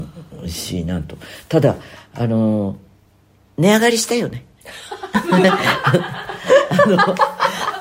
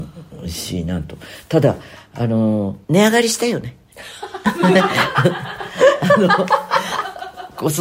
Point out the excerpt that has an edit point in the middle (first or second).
second